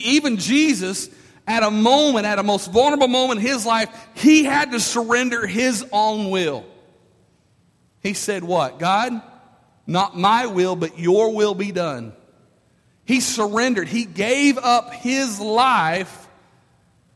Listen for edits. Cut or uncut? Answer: uncut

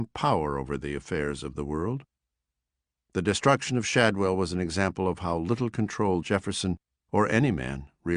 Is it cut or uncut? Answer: uncut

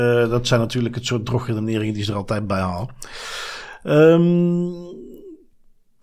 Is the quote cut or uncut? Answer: uncut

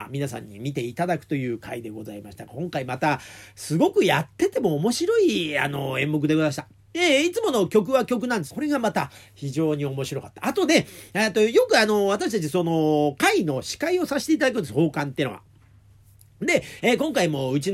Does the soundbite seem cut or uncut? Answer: cut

